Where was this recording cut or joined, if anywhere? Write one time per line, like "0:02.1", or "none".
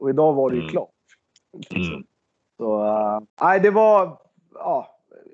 0:03.3